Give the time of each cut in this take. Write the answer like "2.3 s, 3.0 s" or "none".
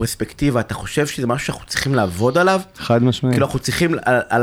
none